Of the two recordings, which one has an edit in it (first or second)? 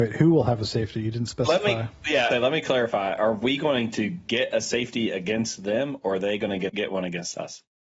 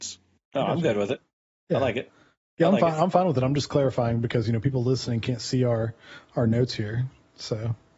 first